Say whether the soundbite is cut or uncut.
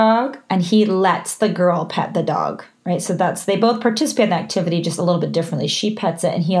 uncut